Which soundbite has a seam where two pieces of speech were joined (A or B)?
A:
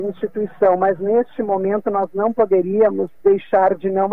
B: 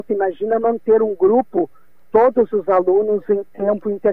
A